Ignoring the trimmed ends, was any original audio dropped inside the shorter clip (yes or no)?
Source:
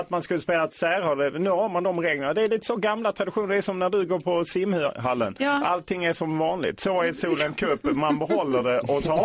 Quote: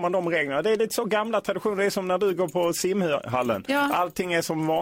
no